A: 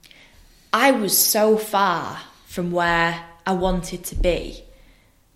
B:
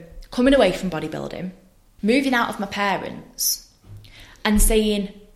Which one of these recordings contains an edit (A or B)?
B